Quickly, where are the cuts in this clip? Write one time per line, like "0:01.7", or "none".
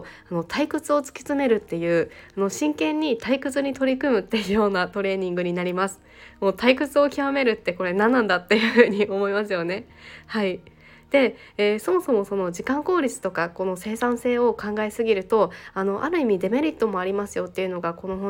none